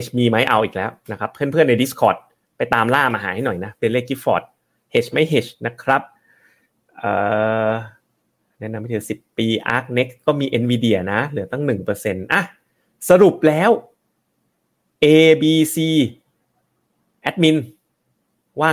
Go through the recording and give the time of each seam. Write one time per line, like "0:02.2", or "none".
none

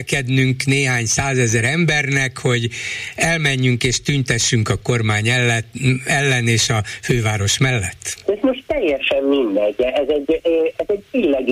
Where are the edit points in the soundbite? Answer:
none

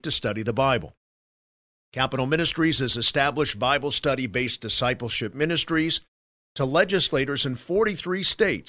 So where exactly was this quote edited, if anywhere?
none

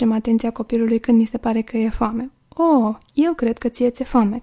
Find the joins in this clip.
none

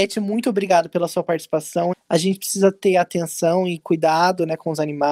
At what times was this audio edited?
0:01.9

